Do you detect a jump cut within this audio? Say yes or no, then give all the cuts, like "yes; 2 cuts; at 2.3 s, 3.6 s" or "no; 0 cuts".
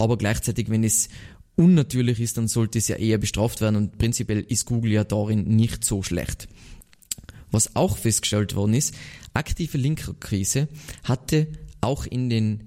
no; 0 cuts